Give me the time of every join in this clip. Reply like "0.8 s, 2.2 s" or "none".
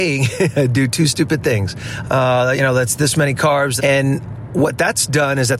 2.0 s, 3.8 s

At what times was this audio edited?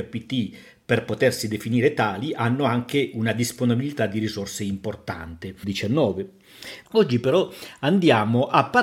5.6 s, 6.8 s

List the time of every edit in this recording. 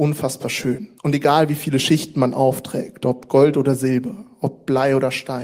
1.0 s

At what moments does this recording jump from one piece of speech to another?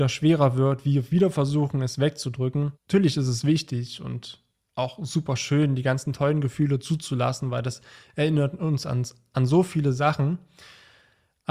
2.7 s

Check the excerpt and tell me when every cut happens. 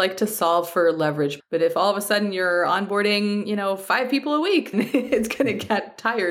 1.4 s, 4.7 s

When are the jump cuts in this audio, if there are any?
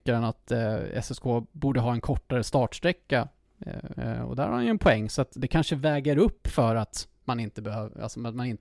3.9 s

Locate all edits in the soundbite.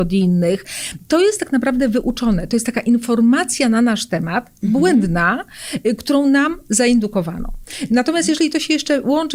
none

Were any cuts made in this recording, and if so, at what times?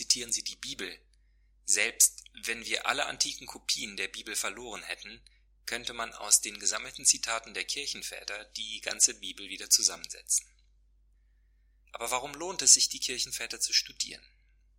none

